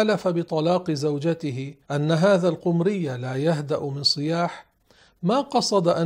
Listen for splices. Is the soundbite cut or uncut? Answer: cut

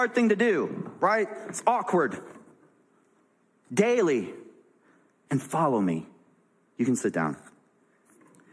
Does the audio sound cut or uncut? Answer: uncut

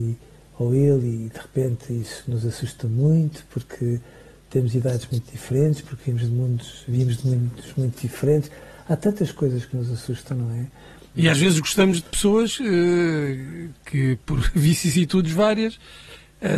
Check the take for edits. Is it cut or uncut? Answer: cut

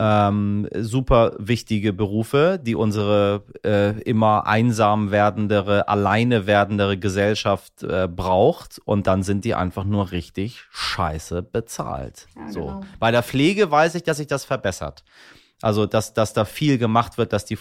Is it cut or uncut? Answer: uncut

